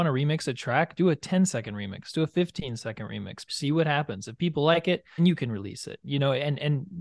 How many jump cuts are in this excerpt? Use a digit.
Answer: 2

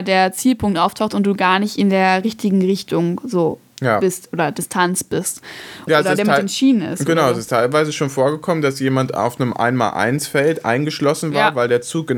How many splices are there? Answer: 1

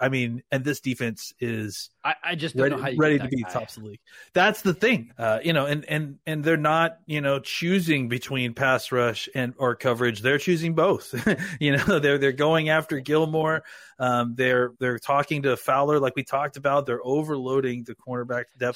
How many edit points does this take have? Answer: 3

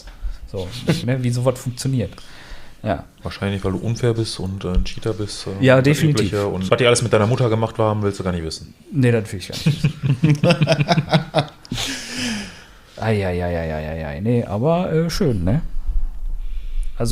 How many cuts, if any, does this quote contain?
2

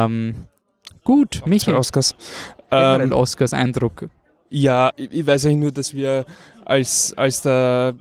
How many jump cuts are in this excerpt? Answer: 1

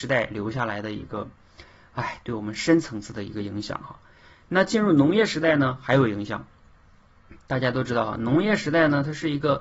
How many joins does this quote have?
0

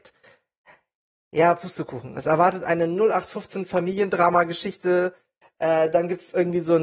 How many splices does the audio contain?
0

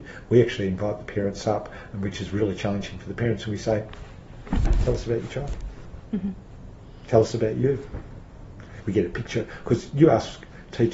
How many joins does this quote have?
1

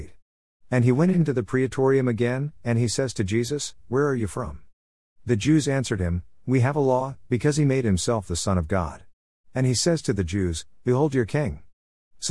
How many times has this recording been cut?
3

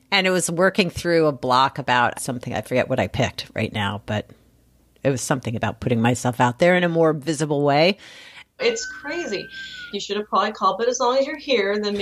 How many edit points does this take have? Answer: 3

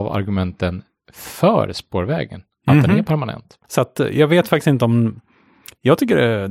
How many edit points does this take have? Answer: 1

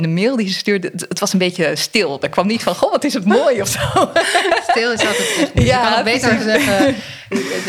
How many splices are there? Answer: 0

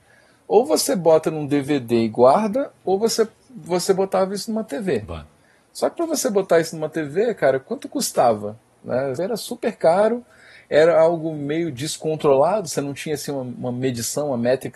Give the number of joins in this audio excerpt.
1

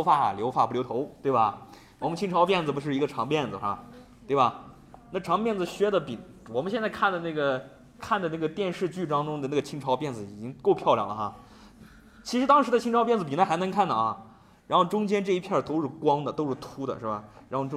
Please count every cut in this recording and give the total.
0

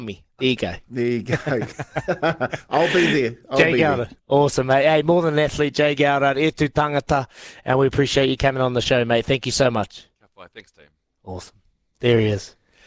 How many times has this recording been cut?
1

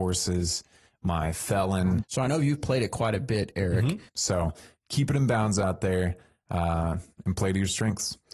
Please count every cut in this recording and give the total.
2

